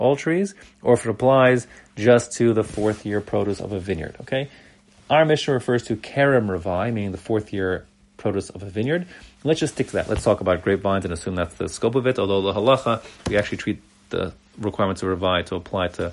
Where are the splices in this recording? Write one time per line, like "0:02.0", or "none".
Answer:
none

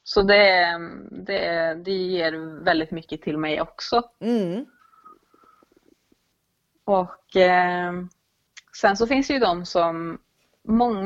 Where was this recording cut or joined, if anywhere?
none

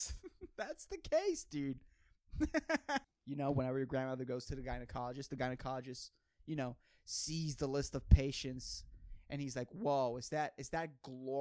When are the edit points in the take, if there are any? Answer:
0:03.0

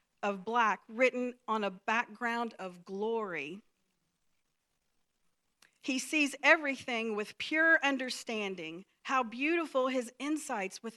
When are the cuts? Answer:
none

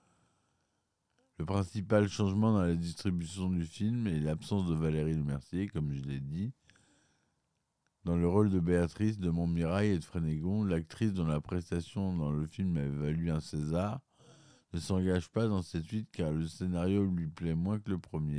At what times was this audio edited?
none

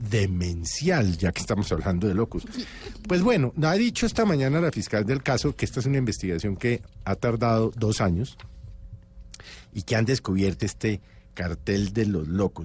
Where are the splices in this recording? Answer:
0:03.0
0:10.6

